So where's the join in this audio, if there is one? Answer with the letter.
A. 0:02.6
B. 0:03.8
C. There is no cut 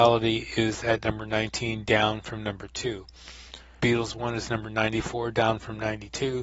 B